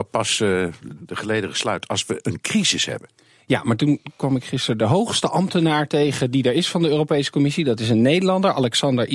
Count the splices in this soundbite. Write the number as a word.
one